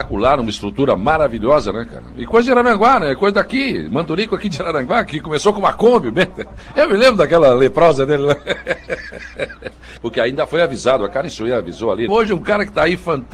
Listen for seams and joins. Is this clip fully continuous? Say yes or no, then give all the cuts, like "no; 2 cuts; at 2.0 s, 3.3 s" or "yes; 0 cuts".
no; 2 cuts; at 10.0 s, 12.1 s